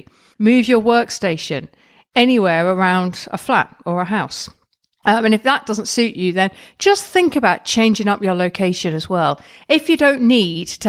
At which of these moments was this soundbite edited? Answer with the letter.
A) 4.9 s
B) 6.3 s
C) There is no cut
C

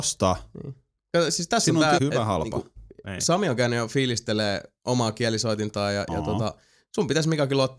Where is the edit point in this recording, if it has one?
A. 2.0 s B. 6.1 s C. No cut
A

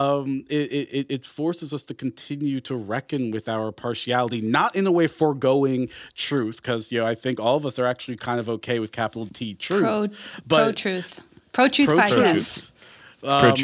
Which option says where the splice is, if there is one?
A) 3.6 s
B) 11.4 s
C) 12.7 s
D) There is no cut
D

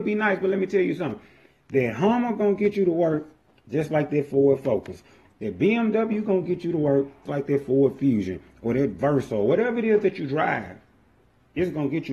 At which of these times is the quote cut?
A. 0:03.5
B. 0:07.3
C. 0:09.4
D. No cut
B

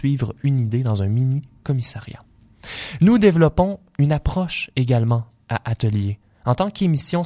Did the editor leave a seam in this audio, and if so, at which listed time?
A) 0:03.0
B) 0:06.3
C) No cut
A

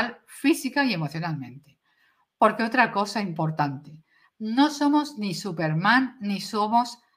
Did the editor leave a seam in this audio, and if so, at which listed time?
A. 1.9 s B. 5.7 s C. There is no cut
C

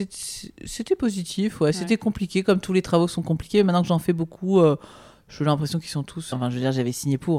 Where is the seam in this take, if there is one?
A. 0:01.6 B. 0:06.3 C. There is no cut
B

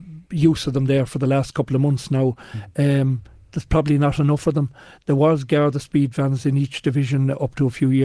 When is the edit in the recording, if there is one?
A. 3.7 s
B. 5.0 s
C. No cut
C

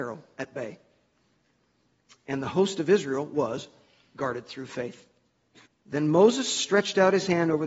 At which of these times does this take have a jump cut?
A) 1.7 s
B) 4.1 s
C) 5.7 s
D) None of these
C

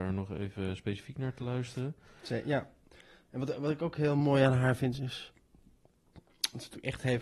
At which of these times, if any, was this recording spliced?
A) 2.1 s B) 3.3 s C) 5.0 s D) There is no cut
C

